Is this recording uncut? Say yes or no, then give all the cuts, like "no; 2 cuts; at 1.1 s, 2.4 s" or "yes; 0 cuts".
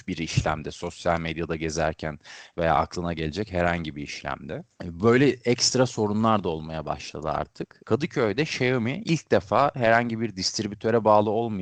no; 1 cut; at 7.8 s